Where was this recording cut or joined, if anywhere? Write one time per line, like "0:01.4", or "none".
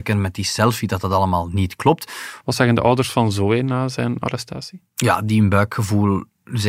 0:02.4